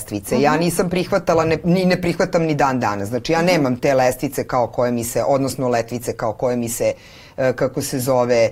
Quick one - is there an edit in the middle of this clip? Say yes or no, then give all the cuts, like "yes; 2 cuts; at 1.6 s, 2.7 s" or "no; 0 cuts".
no; 0 cuts